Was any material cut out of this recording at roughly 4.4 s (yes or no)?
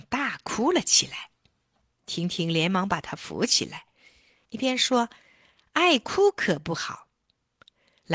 yes